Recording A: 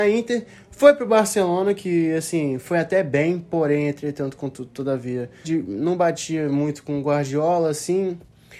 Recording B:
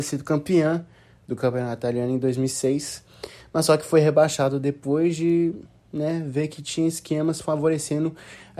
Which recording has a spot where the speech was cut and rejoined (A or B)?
A